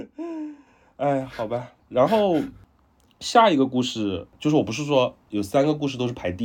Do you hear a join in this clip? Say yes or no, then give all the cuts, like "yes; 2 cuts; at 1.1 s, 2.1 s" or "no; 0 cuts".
yes; 1 cut; at 1.8 s